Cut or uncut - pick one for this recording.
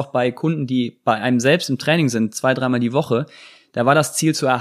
uncut